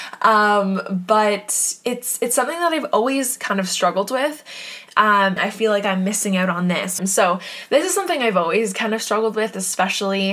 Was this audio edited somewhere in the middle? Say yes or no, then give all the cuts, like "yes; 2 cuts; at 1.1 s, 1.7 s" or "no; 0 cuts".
yes; 2 cuts; at 5.4 s, 7.0 s